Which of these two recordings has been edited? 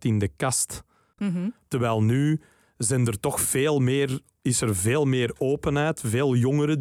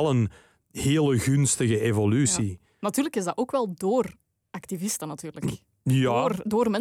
first; 1 cut; at 1.2 s

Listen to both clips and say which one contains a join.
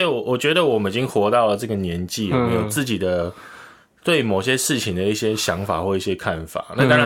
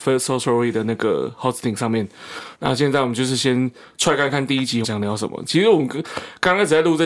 second; 2 cuts; at 2.5 s, 4.8 s

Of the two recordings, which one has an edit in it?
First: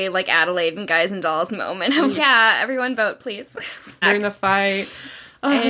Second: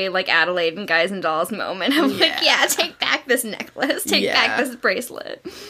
first; 2 cuts; at 2.2 s, 4.0 s

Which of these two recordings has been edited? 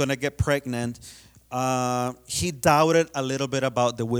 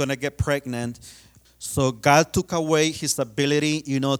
second; 1 cut; at 1.4 s

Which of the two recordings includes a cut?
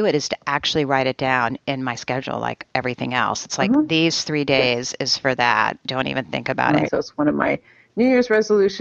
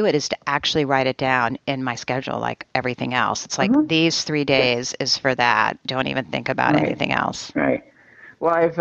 first; 1 cut; at 6.9 s

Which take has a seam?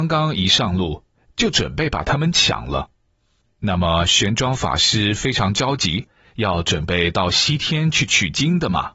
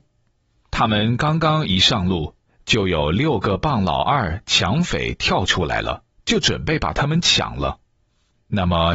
first; 1 cut; at 1.3 s

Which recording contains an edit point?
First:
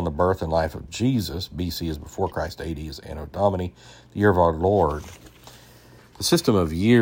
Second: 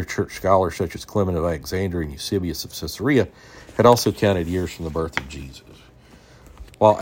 first; 1 cut; at 6.0 s

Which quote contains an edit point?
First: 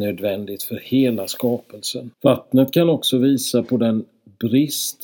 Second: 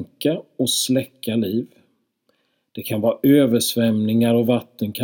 first; 1 cut; at 2.1 s

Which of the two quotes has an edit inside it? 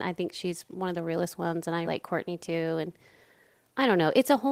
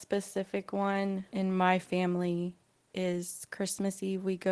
first; 1 cut; at 1.8 s

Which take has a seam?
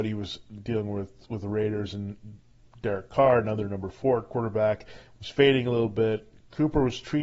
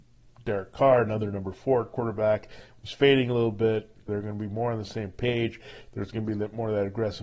second; 1 cut; at 4.1 s

